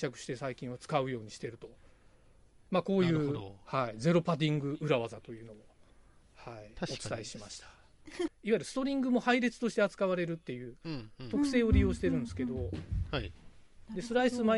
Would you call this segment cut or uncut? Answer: cut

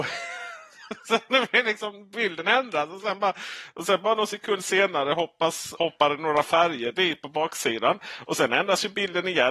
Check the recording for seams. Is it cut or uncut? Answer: cut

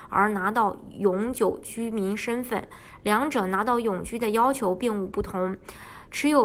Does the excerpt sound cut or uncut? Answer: uncut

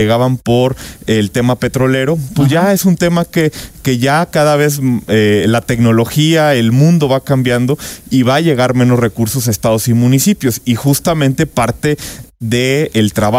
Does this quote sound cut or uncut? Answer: uncut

